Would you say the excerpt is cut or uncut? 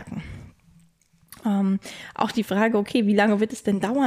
uncut